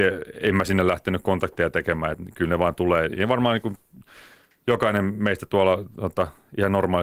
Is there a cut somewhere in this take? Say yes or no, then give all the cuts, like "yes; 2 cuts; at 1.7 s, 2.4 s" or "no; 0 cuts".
no; 0 cuts